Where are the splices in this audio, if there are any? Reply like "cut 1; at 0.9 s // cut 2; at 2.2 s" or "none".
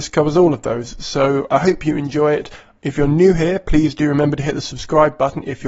cut 1; at 2.8 s